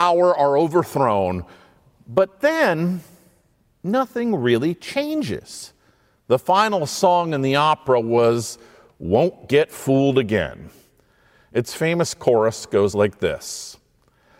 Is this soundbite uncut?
yes; 0 cuts

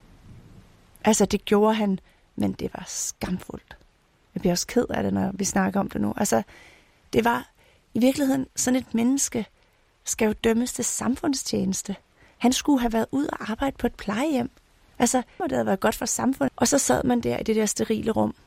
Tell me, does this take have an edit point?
yes; 2 cuts; at 15.4 s, 16.5 s

